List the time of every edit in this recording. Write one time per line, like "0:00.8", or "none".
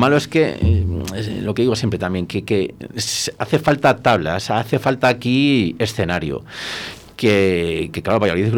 none